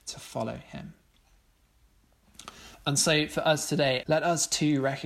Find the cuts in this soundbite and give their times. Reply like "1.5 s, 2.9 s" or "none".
4.0 s